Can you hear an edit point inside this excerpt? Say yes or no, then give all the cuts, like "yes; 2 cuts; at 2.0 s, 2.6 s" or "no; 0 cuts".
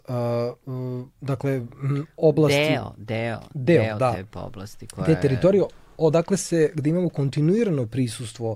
no; 0 cuts